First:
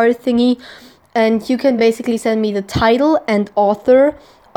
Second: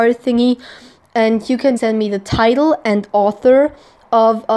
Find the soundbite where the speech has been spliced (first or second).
second